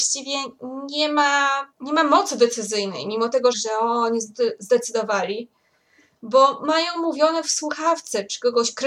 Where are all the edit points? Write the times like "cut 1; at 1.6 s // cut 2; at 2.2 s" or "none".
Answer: cut 1; at 1.7 s // cut 2; at 3.5 s